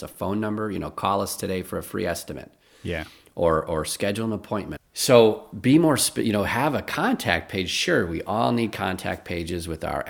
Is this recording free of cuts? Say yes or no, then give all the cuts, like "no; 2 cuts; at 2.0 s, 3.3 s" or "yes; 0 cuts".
no; 1 cut; at 4.8 s